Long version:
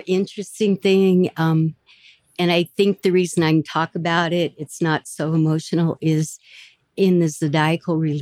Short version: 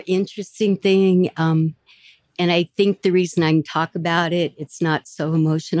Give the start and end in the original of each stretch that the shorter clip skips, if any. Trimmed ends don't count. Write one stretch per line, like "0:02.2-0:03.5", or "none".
none